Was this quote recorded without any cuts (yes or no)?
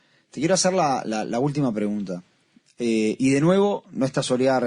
yes